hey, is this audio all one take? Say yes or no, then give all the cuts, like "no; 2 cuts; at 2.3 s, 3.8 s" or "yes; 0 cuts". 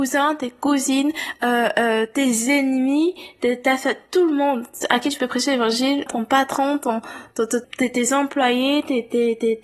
no; 2 cuts; at 6.1 s, 7.6 s